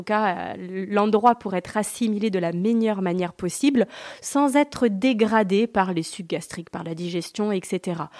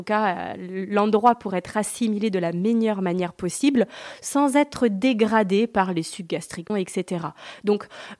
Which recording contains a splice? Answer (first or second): second